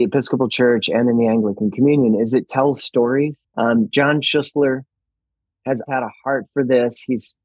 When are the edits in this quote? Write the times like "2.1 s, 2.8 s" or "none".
5.9 s

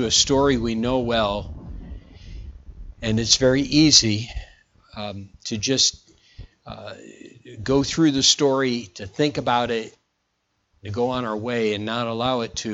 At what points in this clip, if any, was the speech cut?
none

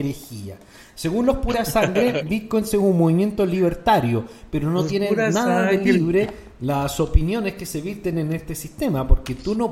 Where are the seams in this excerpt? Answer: none

